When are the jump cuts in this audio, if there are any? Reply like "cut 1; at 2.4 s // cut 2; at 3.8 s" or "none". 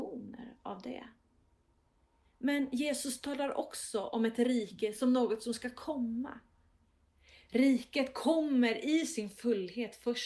none